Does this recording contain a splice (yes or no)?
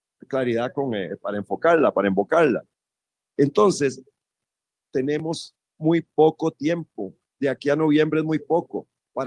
no